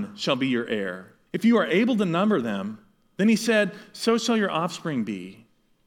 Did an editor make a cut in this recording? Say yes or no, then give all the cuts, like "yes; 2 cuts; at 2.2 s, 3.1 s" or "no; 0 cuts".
yes; 1 cut; at 1.3 s